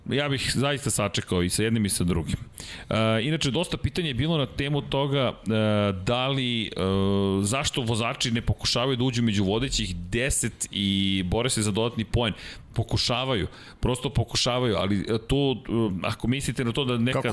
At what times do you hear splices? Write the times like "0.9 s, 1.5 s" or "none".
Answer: none